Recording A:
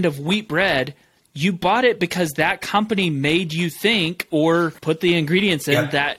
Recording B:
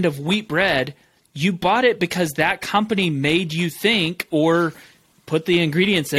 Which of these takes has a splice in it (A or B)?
A